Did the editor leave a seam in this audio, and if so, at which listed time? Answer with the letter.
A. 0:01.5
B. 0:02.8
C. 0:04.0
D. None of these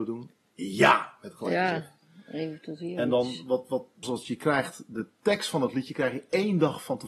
C